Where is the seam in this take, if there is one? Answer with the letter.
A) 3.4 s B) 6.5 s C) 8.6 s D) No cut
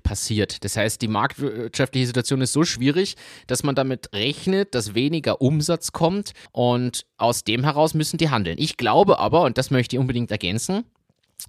B